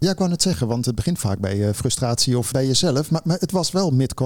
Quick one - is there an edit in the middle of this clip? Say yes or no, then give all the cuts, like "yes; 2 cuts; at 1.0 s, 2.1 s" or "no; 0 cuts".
yes; 1 cut; at 2.5 s